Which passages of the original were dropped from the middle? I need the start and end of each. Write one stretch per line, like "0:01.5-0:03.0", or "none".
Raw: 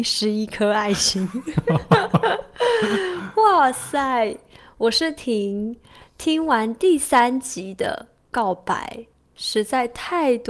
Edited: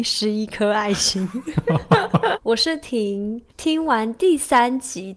0:02.3-0:04.7
0:05.8-0:06.1